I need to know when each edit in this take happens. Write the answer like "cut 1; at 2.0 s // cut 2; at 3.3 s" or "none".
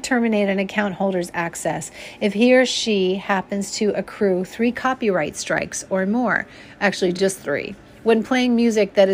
none